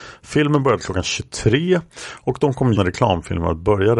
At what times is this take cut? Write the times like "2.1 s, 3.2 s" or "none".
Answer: 2.7 s